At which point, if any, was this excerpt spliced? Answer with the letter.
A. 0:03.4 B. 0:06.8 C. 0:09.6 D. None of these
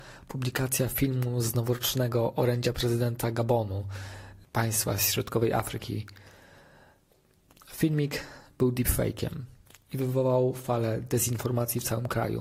D